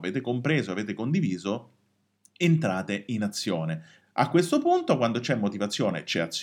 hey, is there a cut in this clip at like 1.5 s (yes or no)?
no